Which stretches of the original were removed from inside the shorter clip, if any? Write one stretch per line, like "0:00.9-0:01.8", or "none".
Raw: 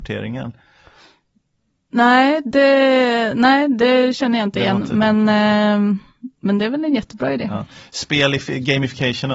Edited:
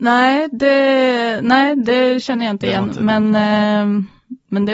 none